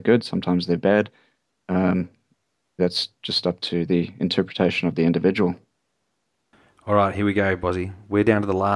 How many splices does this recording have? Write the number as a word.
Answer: one